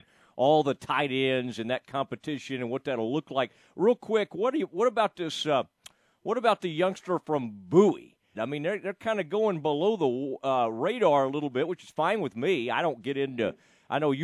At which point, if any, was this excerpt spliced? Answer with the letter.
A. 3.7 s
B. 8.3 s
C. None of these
B